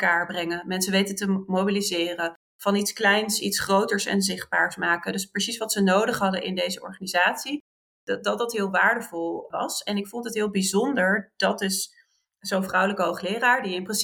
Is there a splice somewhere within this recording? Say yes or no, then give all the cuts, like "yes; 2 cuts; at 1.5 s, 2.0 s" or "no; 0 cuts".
no; 0 cuts